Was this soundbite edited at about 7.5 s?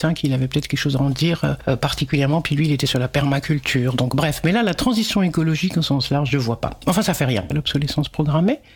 yes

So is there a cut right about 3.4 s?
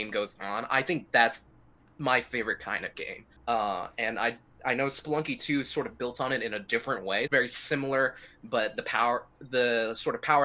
yes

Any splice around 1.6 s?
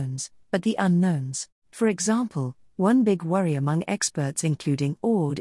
yes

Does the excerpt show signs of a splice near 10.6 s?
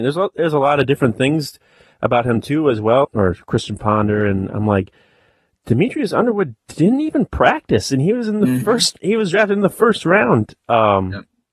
no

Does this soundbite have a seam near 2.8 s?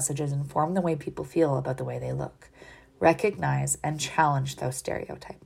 no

